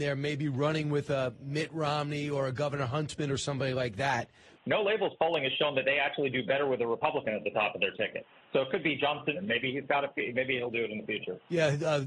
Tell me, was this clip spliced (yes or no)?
yes